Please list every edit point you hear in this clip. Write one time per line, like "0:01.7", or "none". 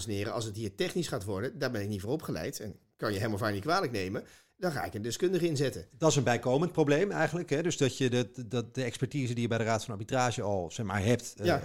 none